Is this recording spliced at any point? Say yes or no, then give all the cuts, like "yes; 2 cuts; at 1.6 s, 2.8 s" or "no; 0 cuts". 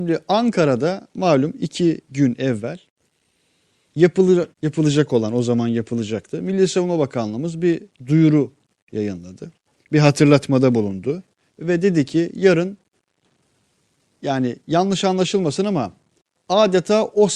yes; 1 cut; at 4.5 s